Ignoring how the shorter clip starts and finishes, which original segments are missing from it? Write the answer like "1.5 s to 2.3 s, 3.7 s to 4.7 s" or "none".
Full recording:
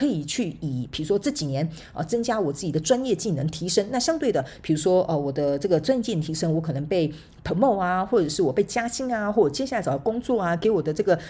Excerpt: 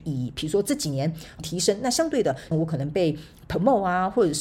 2.0 s to 3.5 s, 4.6 s to 6.5 s